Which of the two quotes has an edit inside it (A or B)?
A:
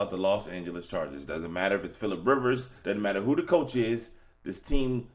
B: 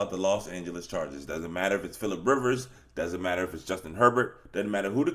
A